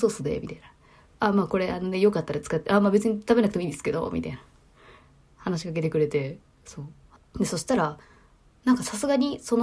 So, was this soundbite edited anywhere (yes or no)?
yes